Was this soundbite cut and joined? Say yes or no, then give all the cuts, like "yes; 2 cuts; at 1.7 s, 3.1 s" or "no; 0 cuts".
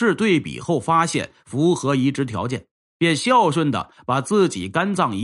no; 0 cuts